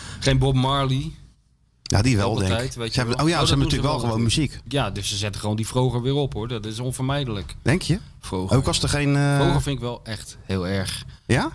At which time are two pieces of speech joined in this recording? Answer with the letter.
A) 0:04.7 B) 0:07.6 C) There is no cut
A